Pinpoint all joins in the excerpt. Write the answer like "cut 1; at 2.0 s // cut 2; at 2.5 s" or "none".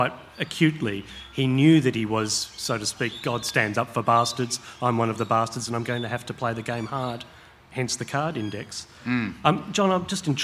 none